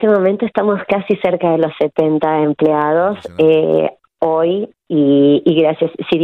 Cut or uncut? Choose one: uncut